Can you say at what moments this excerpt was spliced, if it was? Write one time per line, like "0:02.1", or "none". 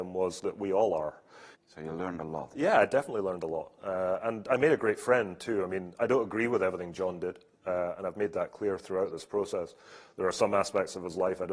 0:01.5